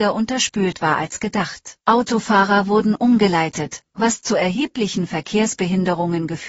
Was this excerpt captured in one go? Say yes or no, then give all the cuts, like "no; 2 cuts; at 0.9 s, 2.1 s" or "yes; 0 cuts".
no; 1 cut; at 1.8 s